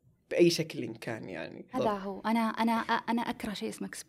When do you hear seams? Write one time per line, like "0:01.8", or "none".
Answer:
0:01.7